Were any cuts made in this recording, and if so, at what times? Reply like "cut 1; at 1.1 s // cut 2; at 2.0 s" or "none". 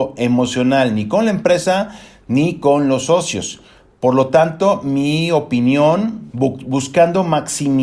cut 1; at 6.3 s